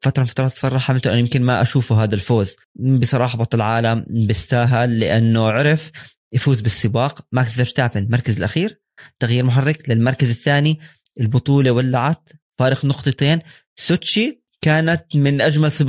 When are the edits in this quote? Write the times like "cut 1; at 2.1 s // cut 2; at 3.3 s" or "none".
cut 1; at 2.6 s